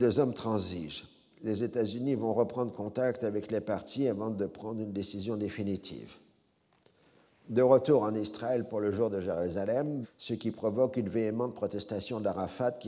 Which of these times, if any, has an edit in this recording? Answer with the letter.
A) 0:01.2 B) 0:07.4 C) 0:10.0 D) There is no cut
C